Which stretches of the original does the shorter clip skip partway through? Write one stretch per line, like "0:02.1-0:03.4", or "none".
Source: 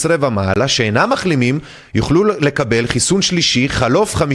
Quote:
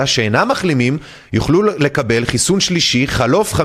none